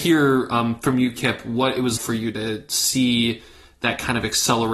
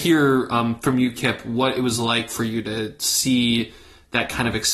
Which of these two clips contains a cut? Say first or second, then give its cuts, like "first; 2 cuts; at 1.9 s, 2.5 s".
first; 1 cut; at 2.0 s